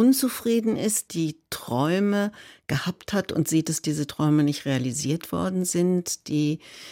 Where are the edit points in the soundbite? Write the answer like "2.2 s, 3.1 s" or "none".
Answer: 1.1 s